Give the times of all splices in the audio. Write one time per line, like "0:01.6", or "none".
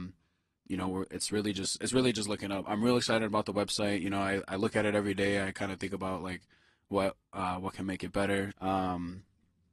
0:08.5